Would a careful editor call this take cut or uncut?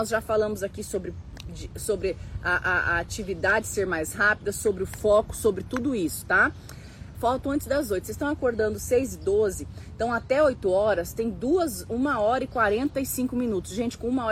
cut